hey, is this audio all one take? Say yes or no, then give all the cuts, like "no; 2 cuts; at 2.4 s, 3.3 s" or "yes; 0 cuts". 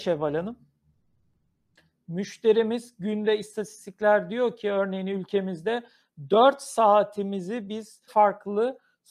no; 1 cut; at 8.1 s